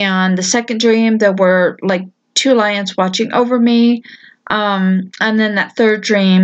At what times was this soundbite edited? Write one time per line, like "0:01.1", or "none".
none